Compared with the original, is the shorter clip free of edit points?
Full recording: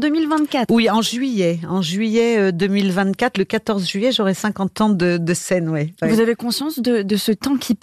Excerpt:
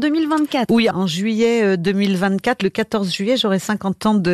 no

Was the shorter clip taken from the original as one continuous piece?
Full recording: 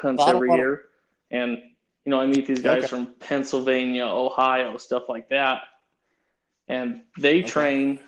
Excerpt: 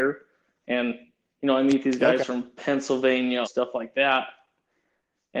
no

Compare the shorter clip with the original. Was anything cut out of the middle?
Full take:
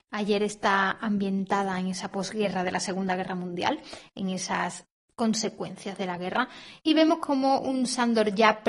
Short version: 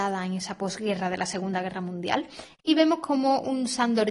yes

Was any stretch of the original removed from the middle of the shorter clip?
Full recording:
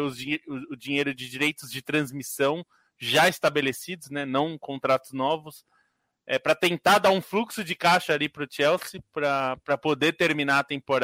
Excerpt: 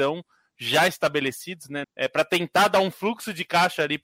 yes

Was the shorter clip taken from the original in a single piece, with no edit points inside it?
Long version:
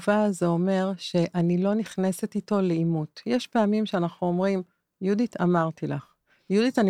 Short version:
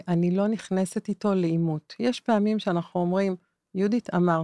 yes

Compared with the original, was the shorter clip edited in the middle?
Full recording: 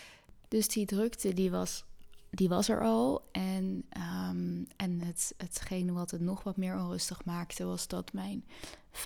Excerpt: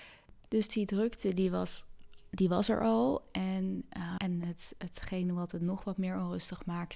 yes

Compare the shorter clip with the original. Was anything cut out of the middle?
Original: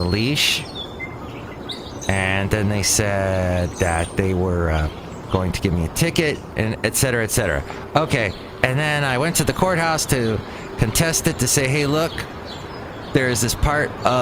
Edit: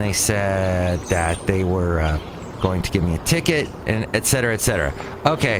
no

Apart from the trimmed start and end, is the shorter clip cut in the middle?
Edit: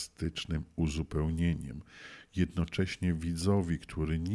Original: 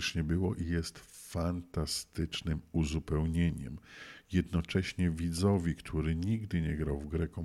no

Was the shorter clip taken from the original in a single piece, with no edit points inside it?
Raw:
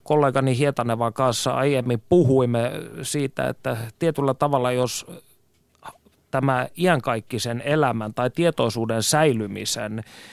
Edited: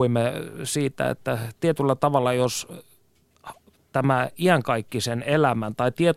yes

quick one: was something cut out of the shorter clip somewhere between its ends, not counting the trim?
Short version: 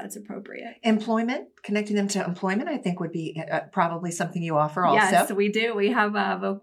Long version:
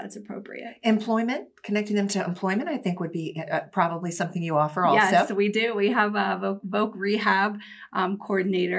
no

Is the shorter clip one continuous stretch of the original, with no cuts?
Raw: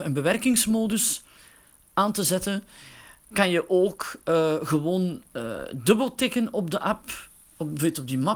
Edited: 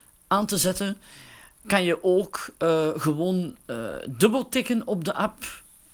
yes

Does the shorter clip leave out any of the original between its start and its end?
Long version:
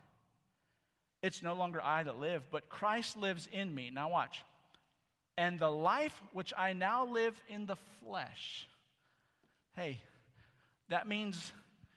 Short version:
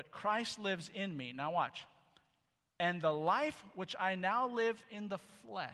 no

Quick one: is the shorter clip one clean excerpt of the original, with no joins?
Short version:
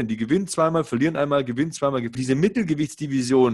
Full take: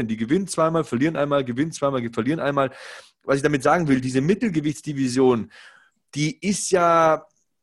no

